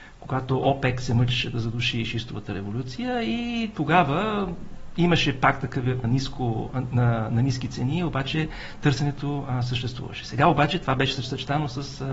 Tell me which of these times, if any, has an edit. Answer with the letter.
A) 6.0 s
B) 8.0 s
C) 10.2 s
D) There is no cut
A